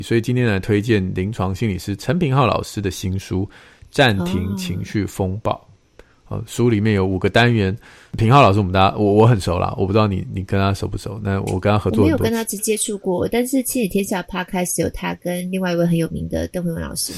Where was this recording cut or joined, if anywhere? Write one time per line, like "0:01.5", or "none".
0:12.6